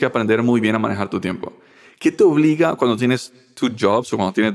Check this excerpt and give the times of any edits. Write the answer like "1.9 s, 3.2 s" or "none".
none